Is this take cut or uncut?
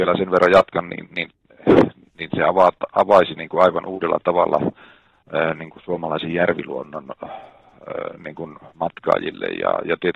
uncut